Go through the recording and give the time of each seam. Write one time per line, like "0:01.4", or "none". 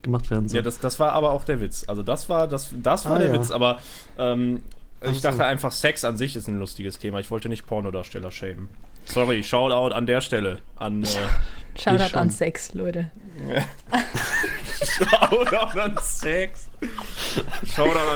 none